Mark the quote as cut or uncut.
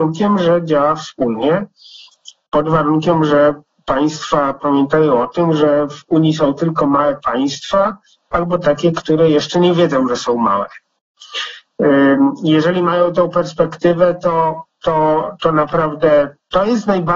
uncut